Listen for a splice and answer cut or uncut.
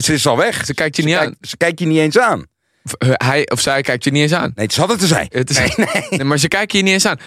uncut